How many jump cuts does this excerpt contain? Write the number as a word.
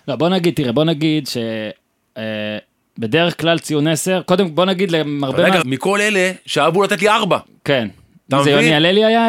one